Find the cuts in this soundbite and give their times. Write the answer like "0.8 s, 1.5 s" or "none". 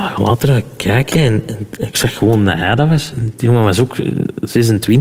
3.1 s